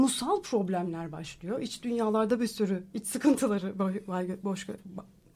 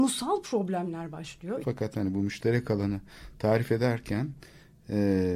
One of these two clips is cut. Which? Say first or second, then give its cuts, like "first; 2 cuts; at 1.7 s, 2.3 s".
second; 1 cut; at 1.6 s